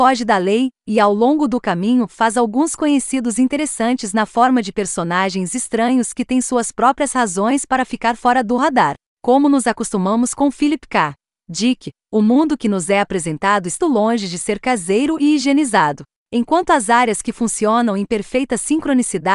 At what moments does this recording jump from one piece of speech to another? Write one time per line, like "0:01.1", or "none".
0:13.8